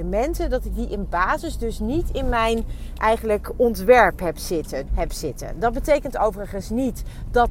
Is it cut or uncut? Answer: cut